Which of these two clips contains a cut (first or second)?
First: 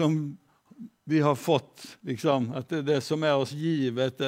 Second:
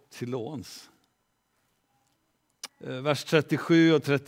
second